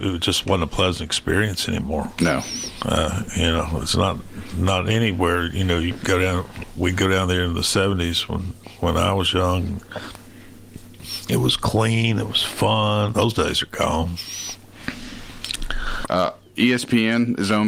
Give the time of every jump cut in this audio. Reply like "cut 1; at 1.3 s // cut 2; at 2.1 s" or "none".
cut 1; at 13.1 s // cut 2; at 16.0 s